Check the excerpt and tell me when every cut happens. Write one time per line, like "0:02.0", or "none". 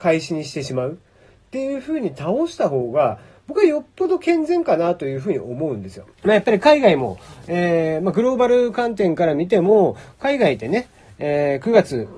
0:06.1

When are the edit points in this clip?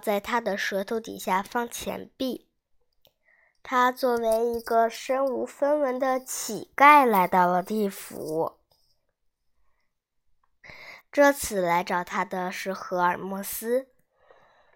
0:11.0

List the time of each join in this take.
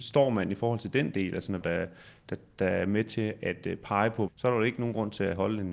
0:01.6
0:04.3

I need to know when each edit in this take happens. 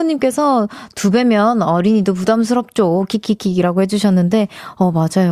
none

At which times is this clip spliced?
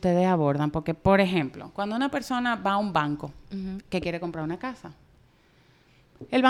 none

